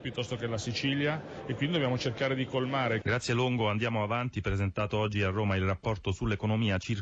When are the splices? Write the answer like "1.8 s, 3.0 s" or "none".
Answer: 3.0 s